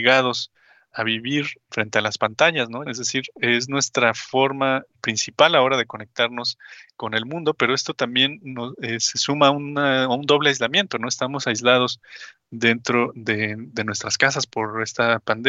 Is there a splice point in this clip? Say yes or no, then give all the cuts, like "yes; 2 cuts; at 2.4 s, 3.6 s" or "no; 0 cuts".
yes; 1 cut; at 2.9 s